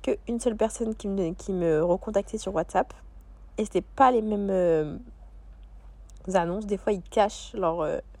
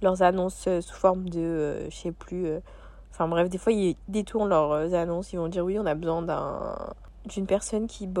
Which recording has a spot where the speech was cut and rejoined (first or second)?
first